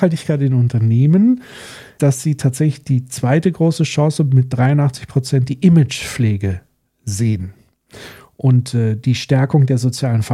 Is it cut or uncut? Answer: cut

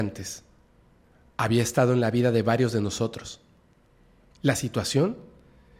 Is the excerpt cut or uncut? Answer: cut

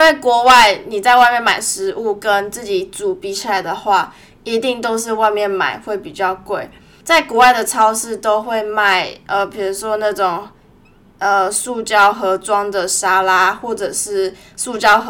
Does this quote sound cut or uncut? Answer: uncut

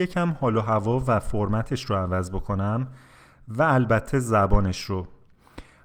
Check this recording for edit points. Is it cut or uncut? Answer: uncut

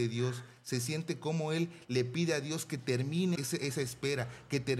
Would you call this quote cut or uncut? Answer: cut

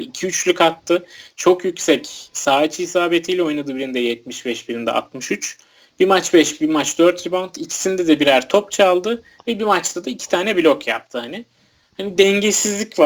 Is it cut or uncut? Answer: uncut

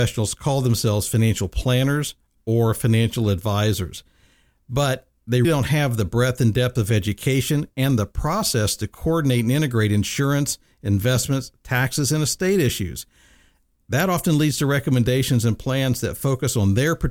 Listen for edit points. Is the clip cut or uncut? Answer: cut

